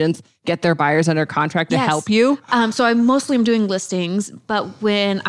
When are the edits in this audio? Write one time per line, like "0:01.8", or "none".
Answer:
0:01.7